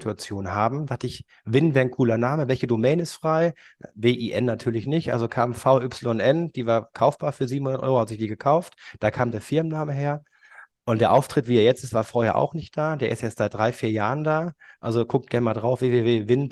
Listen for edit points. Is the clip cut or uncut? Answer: uncut